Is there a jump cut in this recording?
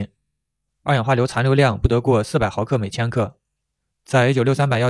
yes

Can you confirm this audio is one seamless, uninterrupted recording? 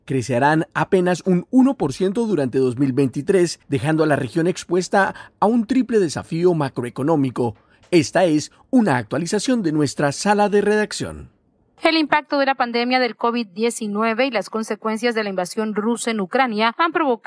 yes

